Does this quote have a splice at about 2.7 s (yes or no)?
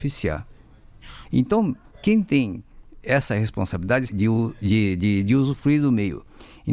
no